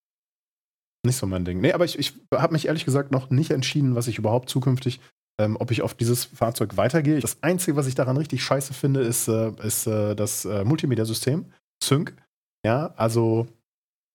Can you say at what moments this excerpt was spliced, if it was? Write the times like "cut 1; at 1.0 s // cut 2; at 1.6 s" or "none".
cut 1; at 7.2 s